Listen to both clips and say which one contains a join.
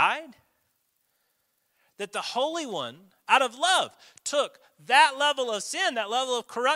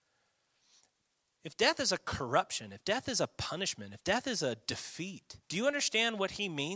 second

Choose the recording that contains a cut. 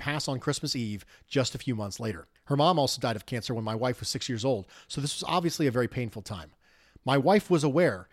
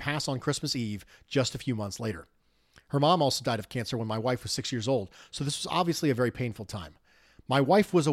first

